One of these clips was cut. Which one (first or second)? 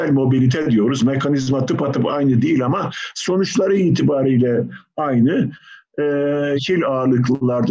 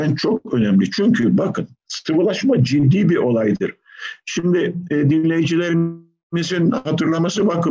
first